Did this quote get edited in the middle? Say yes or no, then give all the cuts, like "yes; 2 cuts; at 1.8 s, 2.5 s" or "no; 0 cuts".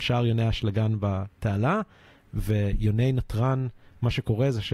no; 0 cuts